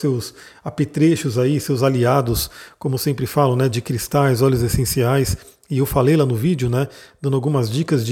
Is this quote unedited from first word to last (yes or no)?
yes